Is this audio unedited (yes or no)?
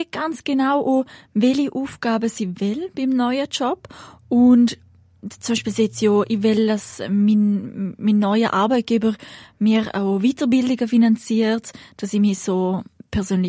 yes